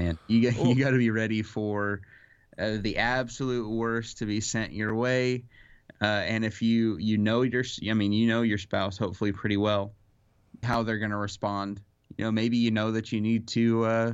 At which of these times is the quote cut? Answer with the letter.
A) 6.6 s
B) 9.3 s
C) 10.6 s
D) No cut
C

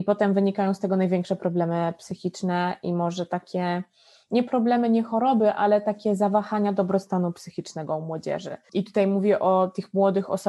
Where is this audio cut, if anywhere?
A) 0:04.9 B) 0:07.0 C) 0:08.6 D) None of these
C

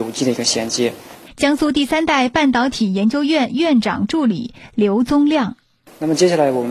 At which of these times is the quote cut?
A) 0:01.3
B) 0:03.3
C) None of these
A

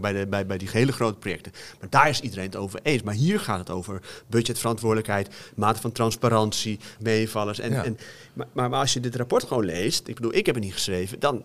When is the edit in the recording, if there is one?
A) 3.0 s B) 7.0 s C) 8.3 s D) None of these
B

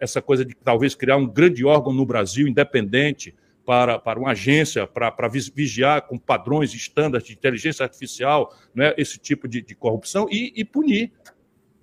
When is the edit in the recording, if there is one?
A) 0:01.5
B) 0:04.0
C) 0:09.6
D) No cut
B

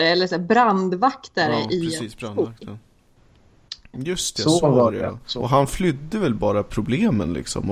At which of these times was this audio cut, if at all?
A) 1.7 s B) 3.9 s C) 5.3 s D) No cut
B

